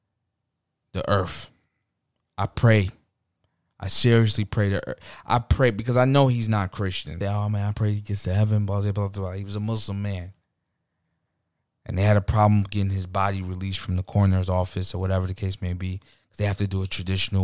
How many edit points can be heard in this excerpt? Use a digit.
1